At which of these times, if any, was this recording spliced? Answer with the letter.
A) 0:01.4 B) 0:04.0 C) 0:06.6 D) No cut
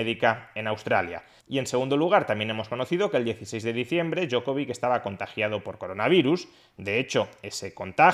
A